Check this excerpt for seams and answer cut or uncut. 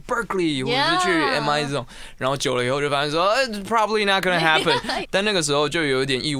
cut